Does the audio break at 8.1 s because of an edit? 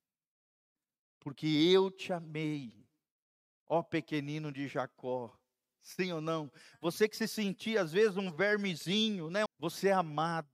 no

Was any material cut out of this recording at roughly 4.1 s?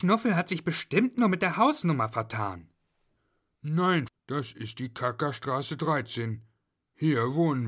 yes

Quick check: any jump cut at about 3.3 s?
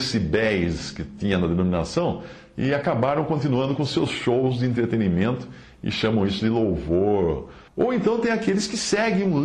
no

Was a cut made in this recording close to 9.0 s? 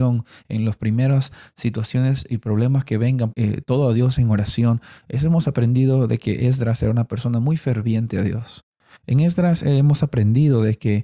yes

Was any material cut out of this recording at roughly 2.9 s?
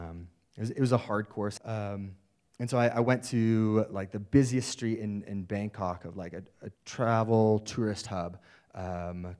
no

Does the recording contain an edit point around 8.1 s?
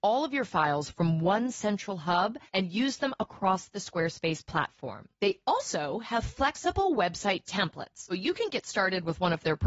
yes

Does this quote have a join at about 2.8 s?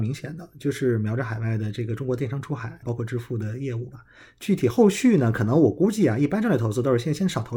yes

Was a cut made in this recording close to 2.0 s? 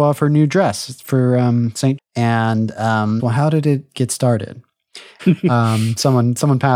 yes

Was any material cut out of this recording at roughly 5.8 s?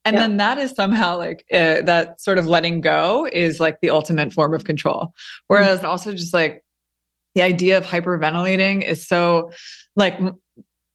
yes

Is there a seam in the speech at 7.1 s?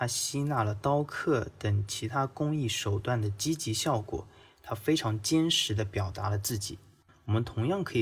yes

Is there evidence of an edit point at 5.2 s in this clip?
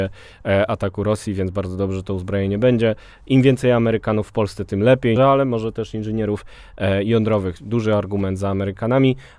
yes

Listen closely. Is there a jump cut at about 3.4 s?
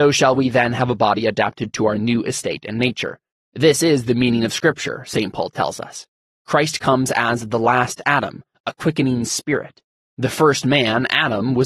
yes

